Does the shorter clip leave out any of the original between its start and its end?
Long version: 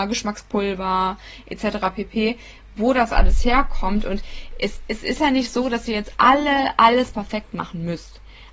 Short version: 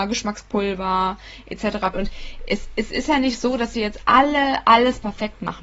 yes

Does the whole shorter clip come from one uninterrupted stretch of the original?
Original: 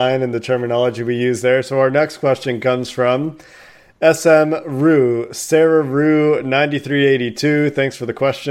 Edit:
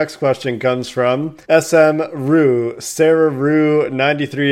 no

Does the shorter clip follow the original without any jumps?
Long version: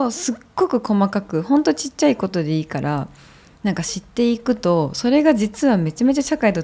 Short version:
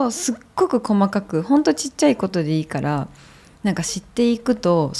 yes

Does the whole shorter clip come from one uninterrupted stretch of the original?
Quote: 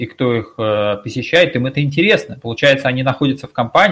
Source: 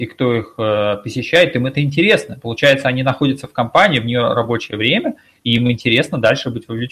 yes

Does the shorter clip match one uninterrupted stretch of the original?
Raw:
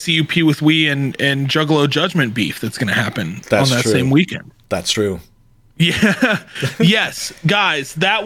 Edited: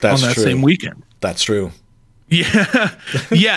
yes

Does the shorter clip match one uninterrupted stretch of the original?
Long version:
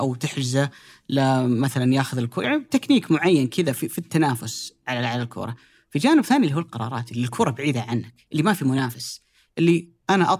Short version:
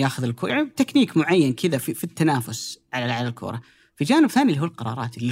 yes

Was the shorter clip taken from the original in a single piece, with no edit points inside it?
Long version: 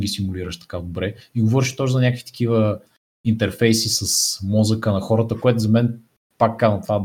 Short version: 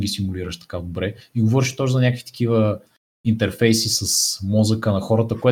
yes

